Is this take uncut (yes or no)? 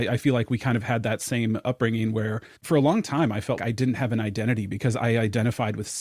no